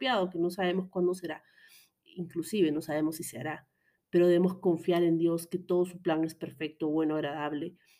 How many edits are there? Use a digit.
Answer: 0